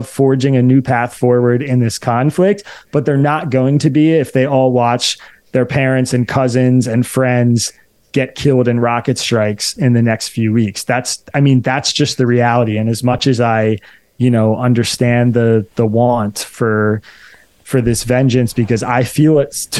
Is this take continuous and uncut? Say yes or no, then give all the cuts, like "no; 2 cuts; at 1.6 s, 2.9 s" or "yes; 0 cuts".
yes; 0 cuts